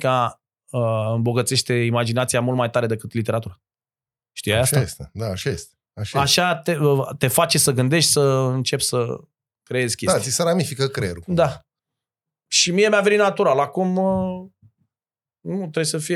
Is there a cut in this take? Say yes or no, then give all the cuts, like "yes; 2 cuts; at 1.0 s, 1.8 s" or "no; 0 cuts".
no; 0 cuts